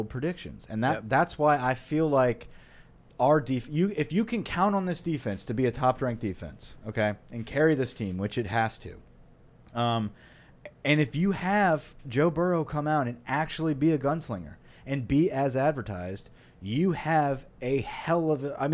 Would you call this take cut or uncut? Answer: uncut